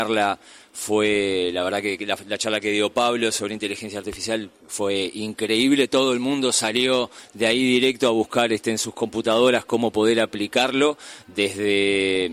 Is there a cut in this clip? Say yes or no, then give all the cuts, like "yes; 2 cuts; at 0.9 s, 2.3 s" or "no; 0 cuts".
no; 0 cuts